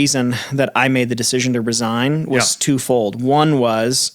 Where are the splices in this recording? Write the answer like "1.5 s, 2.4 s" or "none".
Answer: none